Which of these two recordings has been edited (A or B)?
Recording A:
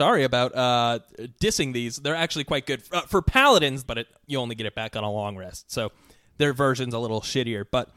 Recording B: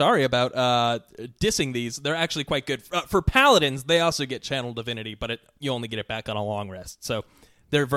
A